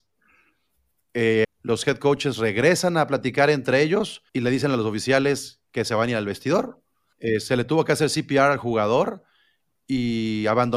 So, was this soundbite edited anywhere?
yes; 3 cuts; at 1.4 s, 4.3 s, 7.1 s

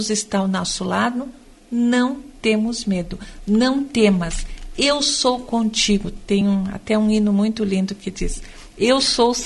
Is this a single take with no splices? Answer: yes; 0 cuts

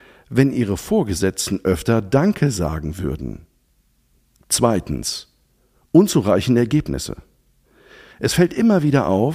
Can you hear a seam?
no; 0 cuts

